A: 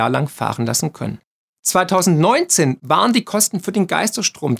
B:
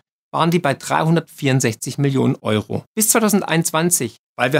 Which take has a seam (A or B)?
B